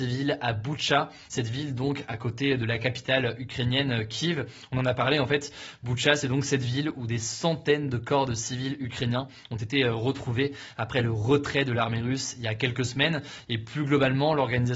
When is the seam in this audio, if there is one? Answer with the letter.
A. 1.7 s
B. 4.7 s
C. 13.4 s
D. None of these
D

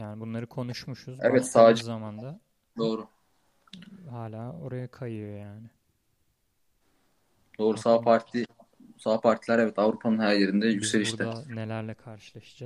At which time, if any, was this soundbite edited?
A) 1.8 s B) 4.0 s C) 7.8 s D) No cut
D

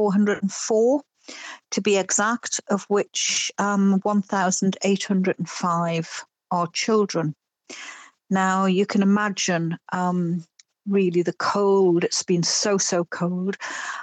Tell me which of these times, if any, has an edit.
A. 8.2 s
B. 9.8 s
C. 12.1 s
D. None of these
D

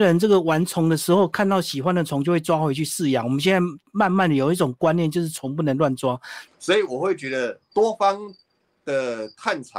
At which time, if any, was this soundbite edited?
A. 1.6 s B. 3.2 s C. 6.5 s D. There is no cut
C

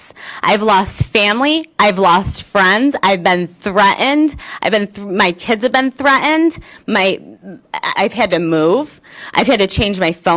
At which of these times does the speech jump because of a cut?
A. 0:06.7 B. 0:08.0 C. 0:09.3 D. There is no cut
B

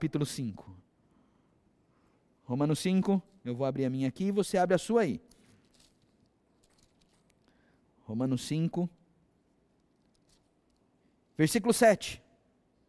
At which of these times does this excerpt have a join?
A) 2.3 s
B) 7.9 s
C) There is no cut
C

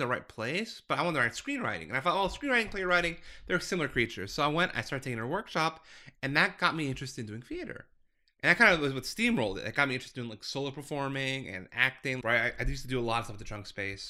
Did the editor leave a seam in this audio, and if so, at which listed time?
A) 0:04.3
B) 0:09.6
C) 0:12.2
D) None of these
C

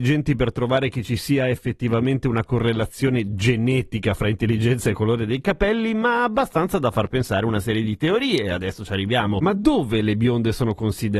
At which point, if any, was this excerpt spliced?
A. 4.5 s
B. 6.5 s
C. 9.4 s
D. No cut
D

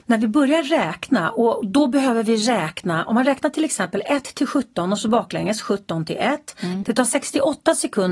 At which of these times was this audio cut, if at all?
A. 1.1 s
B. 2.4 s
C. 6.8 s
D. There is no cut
C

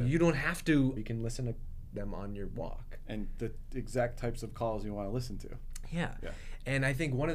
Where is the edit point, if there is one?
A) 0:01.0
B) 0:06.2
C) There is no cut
A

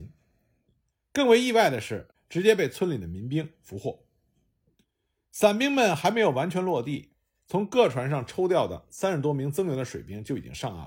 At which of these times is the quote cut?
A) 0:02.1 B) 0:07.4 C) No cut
A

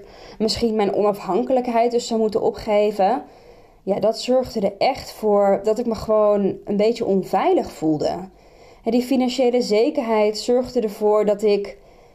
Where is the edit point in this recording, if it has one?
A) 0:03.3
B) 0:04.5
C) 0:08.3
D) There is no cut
D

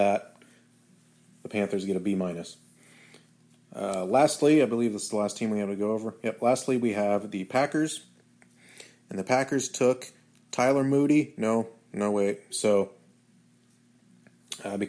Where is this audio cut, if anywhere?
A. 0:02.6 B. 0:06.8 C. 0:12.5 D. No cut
C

